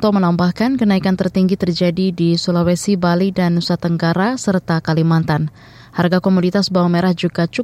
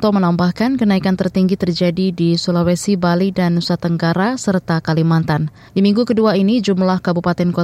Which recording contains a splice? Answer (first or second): second